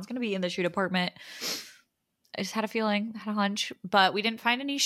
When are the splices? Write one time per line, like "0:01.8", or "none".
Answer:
none

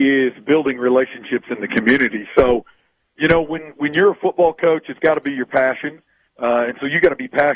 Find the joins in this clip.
none

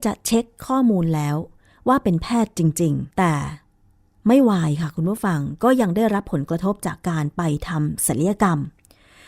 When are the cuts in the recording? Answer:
0:03.1

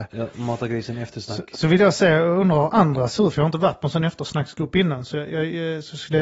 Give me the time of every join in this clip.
none

